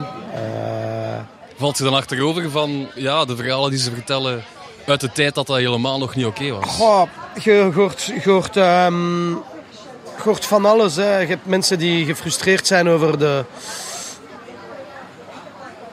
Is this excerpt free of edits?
yes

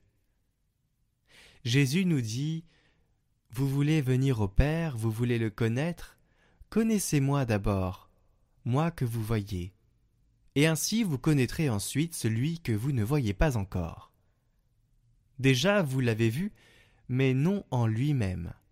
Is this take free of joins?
yes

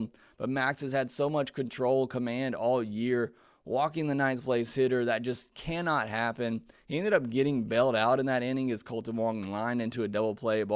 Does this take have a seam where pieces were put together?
no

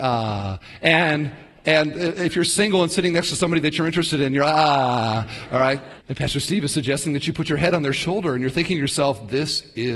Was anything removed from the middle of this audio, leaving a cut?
yes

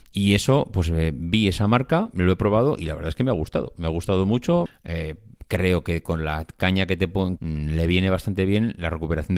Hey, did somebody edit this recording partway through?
yes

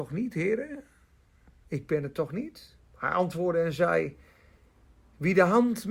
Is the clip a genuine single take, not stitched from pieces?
no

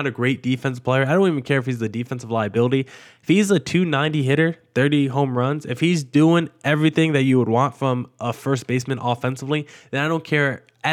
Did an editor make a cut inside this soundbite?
no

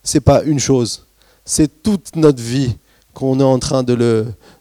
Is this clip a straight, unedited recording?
yes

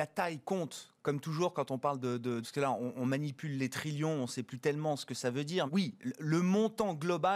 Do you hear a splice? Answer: yes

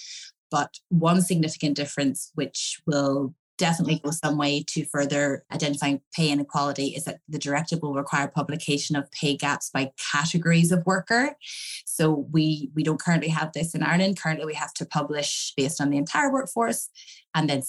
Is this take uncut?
yes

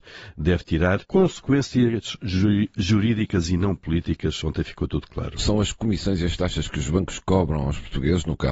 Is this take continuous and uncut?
no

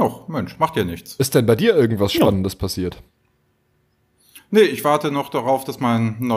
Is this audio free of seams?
yes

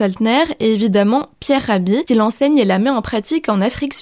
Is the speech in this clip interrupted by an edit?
no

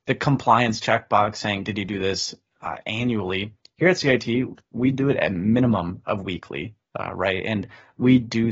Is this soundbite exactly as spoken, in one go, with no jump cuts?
yes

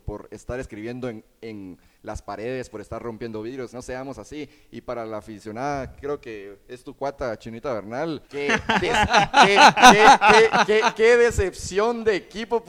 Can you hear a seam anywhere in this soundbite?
yes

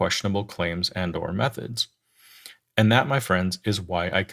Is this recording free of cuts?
yes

